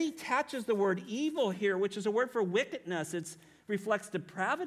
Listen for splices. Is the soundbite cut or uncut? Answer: uncut